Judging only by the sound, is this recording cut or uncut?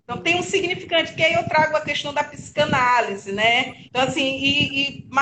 cut